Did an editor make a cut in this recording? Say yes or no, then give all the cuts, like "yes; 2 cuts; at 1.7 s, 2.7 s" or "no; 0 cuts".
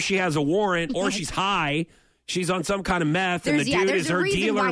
no; 0 cuts